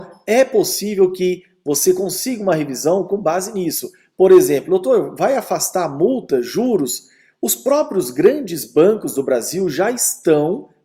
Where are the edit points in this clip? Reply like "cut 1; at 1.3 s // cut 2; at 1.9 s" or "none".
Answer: none